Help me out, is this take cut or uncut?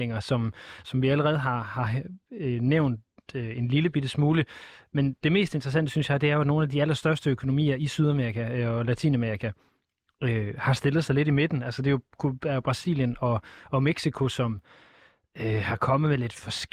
uncut